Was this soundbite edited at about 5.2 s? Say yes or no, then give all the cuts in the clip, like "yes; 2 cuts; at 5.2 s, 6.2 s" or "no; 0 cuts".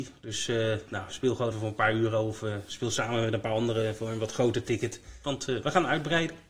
yes; 2 cuts; at 1.5 s, 5.2 s